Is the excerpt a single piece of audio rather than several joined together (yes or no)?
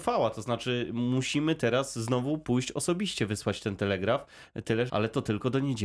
no